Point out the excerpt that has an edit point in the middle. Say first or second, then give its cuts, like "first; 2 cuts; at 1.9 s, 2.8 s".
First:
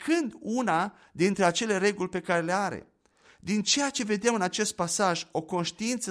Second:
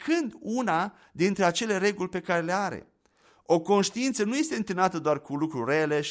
first; 1 cut; at 3.2 s